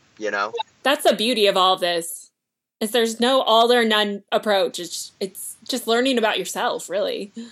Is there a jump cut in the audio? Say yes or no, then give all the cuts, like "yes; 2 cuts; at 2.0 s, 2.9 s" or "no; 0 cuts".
no; 0 cuts